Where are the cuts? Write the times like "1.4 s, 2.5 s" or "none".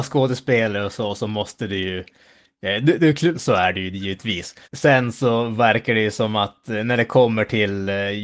3.3 s, 4.6 s